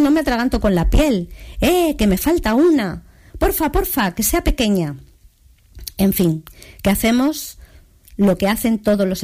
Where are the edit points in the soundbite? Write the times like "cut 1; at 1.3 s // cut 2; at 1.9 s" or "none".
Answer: none